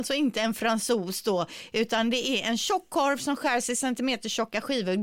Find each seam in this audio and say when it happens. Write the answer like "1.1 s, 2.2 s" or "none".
none